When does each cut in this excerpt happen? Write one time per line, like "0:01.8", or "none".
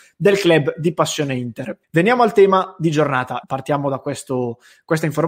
0:01.8
0:03.4